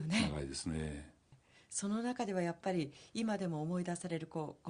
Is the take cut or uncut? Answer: cut